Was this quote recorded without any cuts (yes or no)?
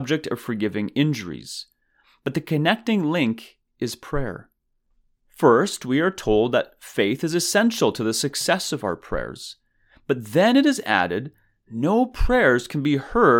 yes